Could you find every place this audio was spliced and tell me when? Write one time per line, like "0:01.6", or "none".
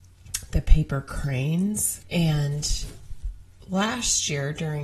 0:02.0